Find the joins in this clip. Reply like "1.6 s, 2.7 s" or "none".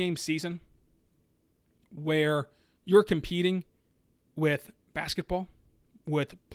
none

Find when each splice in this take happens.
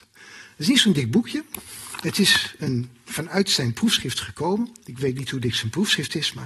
none

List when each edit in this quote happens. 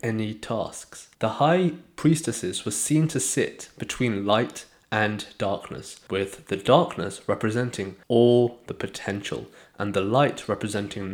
none

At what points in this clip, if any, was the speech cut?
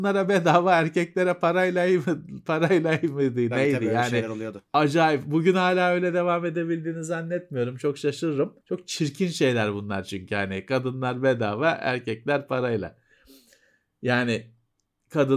8.6 s

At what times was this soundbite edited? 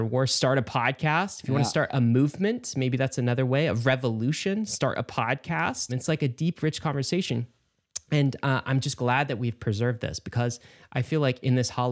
5.9 s

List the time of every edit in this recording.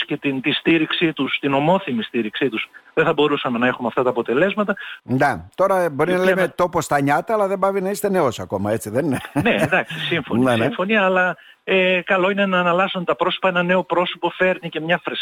5.0 s

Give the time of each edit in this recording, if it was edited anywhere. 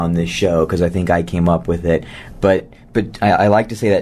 none

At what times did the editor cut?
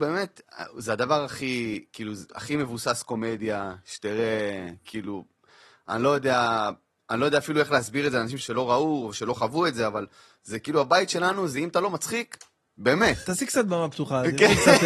8.4 s, 13.2 s

